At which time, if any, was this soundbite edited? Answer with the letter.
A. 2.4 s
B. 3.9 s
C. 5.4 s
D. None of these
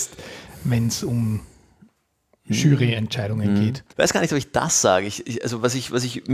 B